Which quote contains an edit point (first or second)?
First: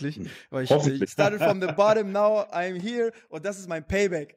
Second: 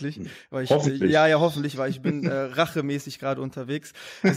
first